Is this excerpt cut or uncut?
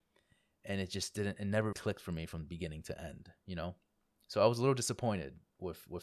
cut